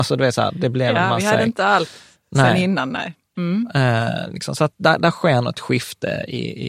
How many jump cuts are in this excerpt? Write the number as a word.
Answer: one